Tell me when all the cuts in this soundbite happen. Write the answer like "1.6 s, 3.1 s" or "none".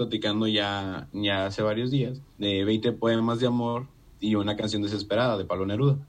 2.3 s